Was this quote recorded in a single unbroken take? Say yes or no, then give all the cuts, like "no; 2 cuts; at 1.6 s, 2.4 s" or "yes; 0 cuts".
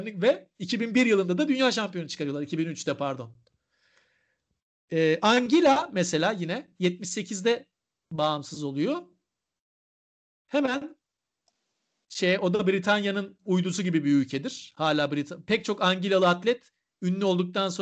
yes; 0 cuts